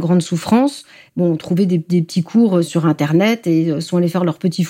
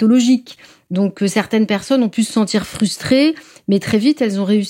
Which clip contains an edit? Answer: first; 2 cuts; at 1.1 s, 2.6 s

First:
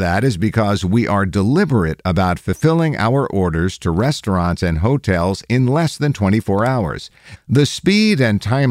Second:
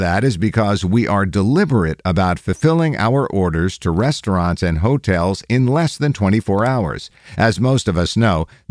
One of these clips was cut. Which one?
first; 1 cut; at 7.4 s

